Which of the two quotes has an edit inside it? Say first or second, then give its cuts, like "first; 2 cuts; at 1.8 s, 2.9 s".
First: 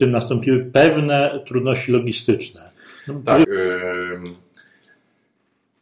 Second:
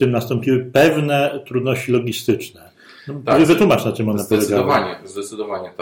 first; 1 cut; at 3.4 s